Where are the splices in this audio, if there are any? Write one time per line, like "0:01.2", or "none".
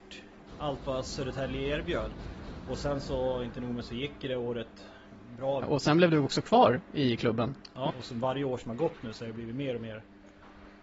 0:05.6
0:07.9